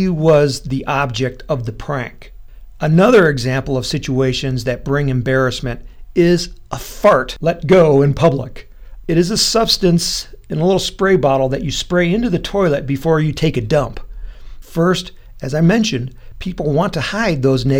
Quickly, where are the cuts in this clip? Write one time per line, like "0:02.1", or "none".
0:09.0
0:14.6